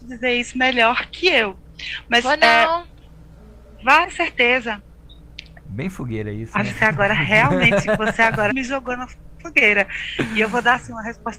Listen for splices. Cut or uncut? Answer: cut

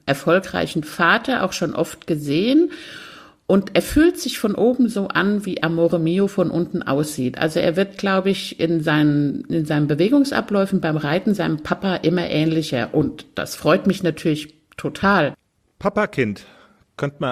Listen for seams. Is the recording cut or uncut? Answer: uncut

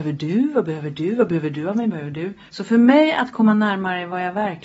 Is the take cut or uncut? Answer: cut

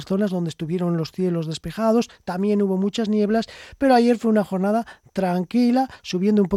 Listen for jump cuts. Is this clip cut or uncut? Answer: uncut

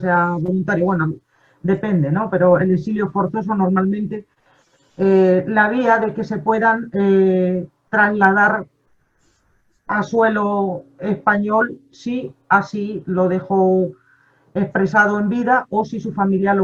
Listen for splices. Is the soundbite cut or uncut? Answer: uncut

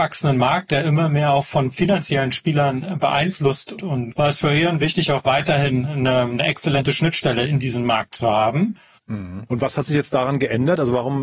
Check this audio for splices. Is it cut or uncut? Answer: cut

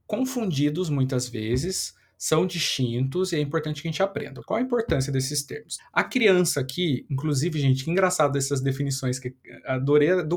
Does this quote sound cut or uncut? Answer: cut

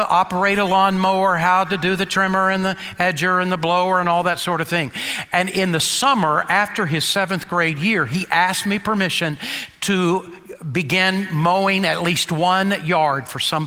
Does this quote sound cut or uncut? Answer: uncut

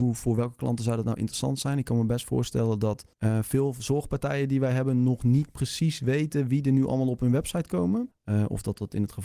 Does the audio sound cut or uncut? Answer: cut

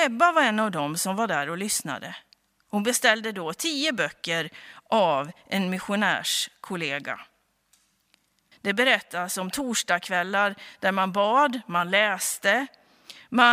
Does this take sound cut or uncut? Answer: cut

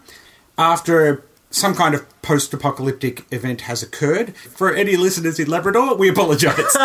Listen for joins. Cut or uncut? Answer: cut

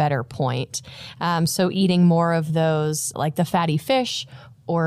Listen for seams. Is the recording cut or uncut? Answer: cut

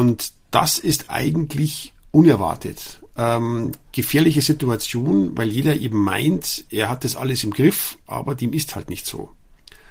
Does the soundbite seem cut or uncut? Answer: uncut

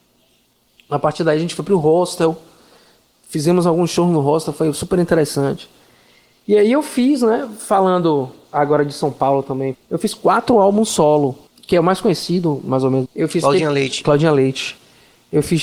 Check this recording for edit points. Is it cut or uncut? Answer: cut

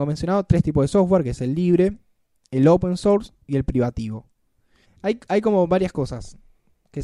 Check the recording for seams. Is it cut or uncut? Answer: uncut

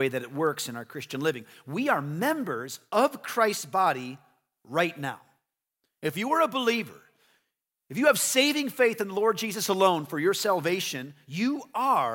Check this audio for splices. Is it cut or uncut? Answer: uncut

